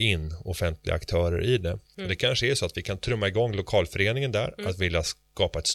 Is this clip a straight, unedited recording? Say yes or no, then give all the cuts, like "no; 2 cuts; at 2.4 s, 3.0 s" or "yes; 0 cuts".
no; 1 cut; at 1.9 s